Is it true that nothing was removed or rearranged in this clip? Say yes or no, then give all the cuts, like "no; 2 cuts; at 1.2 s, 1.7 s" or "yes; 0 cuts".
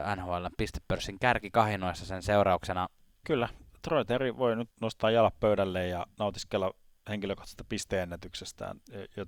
no; 3 cuts; at 3.2 s, 4.7 s, 6.1 s